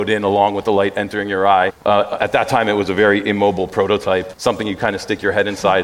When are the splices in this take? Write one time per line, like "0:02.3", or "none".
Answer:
0:01.7
0:04.3